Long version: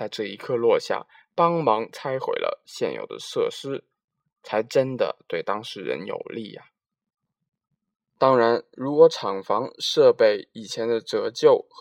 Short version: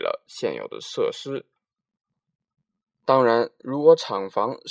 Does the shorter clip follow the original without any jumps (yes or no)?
no